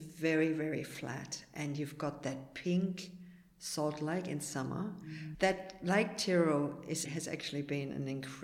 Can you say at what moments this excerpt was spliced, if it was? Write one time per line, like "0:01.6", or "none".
0:05.3
0:07.1